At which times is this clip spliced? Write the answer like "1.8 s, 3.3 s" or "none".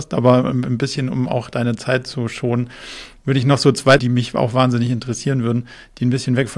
4.0 s